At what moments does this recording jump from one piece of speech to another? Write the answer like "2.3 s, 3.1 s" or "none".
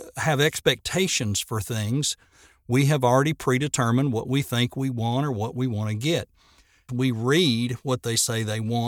6.9 s